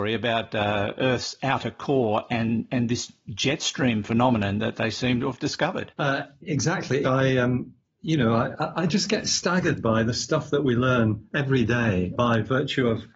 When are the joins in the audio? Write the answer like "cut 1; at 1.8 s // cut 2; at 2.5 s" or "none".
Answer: cut 1; at 7.0 s